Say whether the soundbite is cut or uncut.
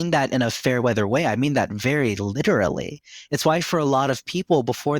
uncut